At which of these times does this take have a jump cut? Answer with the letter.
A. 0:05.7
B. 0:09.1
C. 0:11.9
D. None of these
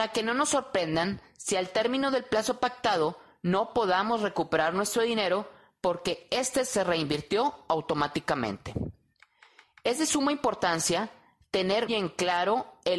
C